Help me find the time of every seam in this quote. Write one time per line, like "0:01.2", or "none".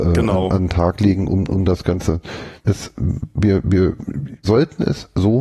0:02.6
0:04.4